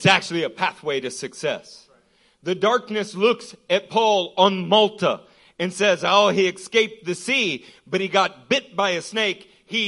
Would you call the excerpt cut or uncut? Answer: uncut